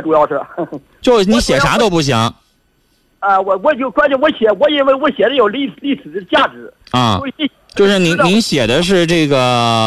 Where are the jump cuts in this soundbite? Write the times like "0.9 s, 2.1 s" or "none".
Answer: none